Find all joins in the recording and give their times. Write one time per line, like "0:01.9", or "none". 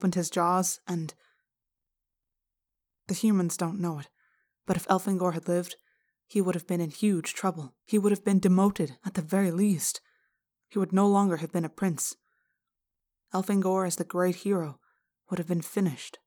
0:07.8